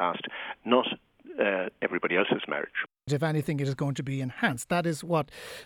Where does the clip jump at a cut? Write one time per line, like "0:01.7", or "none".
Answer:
0:03.1